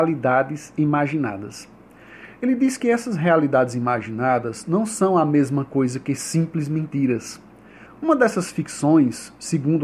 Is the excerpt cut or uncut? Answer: cut